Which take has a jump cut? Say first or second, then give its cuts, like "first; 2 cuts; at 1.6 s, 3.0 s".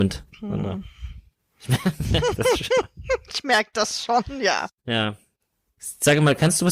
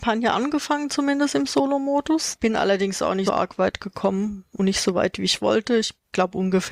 second; 1 cut; at 3.3 s